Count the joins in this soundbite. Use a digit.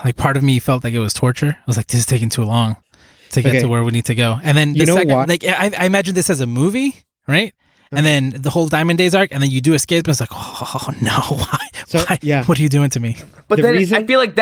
1